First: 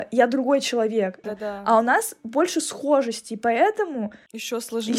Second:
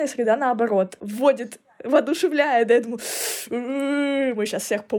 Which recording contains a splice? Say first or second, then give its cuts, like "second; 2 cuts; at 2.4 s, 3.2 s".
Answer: first; 1 cut; at 1.2 s